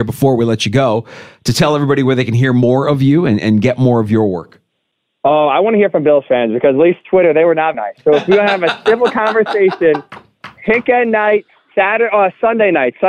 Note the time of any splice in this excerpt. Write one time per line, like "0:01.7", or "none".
0:07.7